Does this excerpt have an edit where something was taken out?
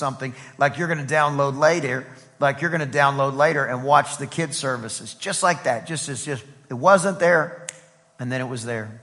no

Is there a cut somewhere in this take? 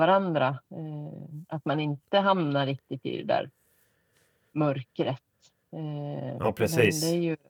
no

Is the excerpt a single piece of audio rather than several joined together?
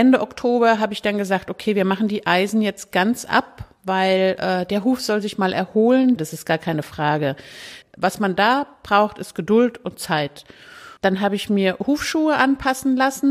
no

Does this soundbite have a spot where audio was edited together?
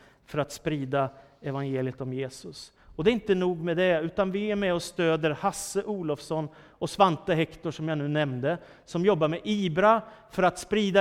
no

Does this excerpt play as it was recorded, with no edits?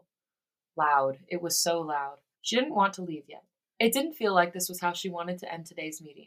no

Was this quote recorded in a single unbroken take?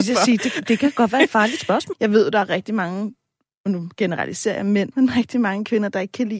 no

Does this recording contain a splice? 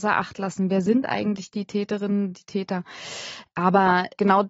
no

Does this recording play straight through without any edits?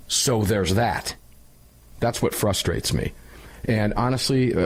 yes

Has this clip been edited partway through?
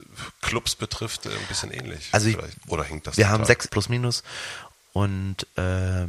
yes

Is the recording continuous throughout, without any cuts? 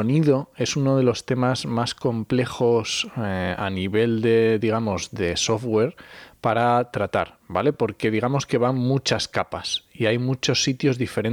yes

